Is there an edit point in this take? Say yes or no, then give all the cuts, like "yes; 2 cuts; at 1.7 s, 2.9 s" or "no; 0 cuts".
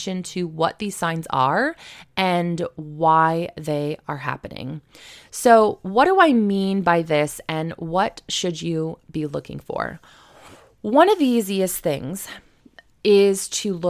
no; 0 cuts